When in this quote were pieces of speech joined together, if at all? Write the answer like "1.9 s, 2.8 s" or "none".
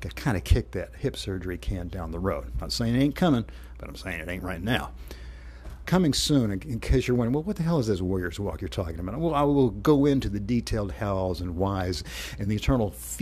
5.8 s